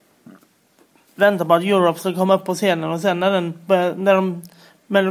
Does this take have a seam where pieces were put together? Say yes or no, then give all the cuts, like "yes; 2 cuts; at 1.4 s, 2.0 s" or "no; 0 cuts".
no; 0 cuts